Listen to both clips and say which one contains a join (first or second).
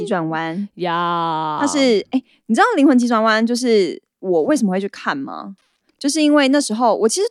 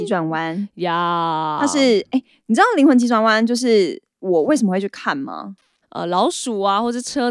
second